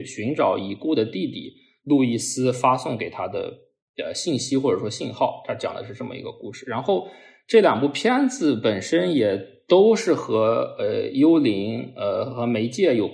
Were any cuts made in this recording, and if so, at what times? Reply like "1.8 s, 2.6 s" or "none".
none

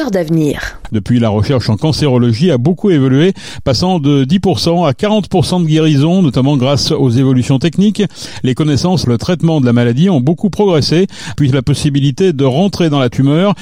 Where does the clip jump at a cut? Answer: 0.9 s, 9.0 s, 11.4 s

